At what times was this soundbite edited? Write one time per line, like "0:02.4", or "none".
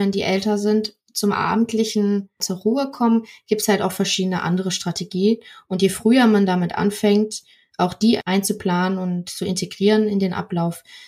none